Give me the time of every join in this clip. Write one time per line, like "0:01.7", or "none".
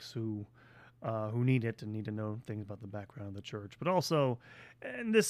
none